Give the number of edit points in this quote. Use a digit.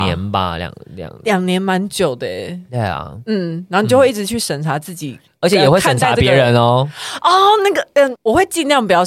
1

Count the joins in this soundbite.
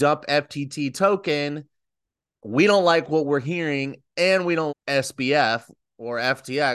1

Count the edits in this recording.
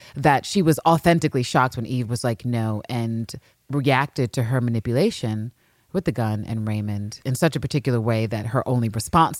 0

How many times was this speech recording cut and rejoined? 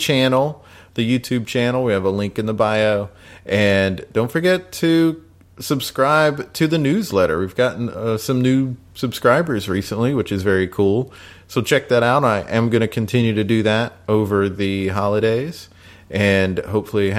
0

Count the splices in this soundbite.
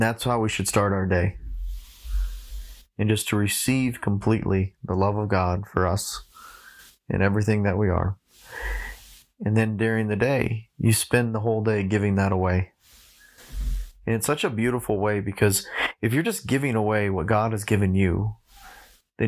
0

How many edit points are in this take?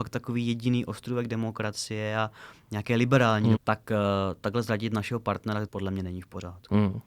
2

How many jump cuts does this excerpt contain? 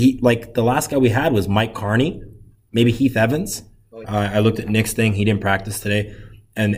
1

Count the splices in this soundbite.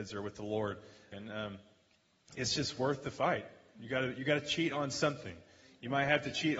1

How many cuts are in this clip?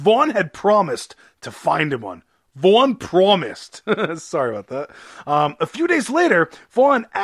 0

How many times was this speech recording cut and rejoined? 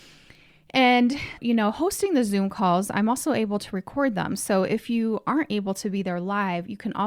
1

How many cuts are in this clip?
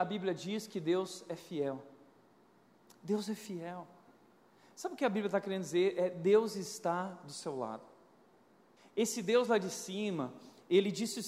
1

